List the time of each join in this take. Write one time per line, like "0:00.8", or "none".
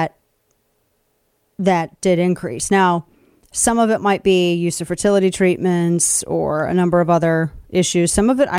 none